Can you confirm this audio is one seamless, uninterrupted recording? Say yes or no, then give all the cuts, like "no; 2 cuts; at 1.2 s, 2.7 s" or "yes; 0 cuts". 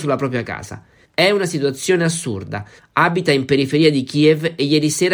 no; 2 cuts; at 1.0 s, 2.8 s